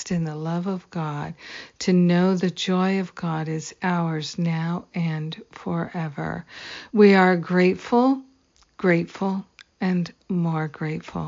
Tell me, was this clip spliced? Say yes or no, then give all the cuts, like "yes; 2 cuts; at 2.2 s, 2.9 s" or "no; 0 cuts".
no; 0 cuts